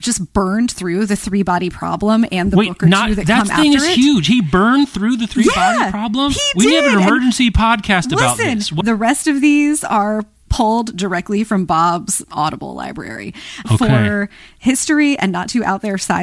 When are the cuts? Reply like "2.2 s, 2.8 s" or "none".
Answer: 8.8 s, 13.6 s